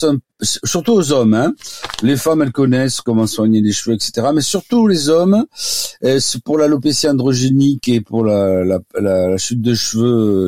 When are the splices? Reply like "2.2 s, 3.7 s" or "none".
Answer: none

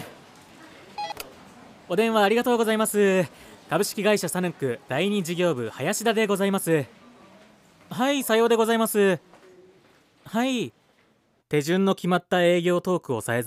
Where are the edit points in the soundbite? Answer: 11.4 s

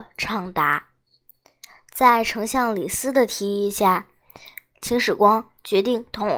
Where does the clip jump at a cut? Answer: none

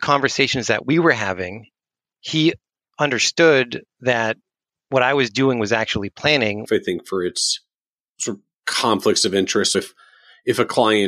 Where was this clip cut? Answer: 6.7 s, 9.7 s

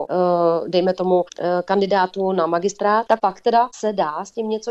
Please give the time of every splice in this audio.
3.1 s

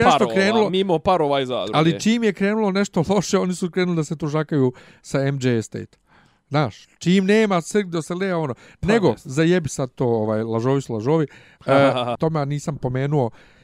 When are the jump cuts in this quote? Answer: 12.1 s

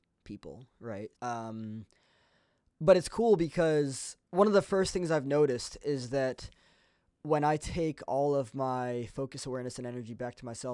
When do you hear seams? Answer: 1.1 s, 4.2 s

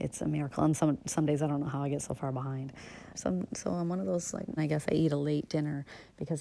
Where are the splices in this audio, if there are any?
3.1 s, 4.6 s

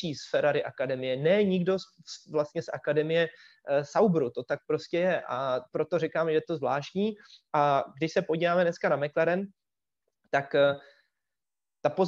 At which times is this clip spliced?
none

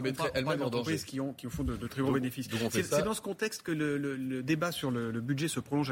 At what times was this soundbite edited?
none

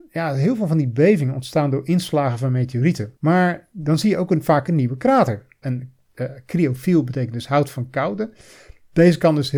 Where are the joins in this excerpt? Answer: 3.2 s, 5.6 s

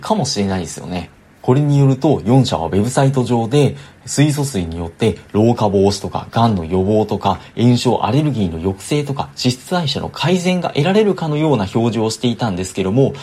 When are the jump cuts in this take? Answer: 1.4 s

